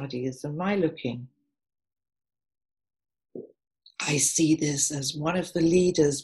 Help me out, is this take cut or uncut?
uncut